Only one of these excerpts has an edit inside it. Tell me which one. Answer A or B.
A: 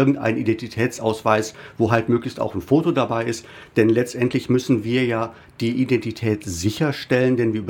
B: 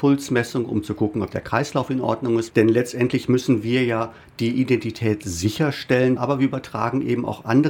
B